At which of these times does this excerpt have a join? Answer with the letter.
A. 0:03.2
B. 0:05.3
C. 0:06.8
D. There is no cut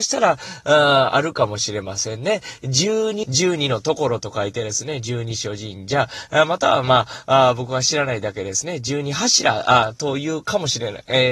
A